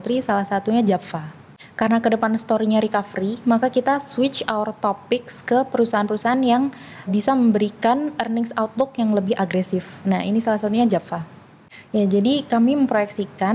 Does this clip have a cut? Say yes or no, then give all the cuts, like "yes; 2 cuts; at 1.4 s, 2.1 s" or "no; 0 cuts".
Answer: yes; 2 cuts; at 7.1 s, 11.9 s